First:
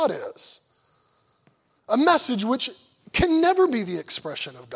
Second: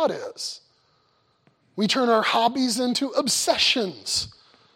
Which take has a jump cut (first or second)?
second